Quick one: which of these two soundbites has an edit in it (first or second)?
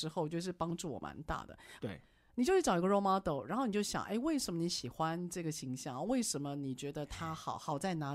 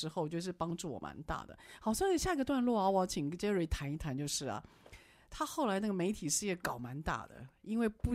first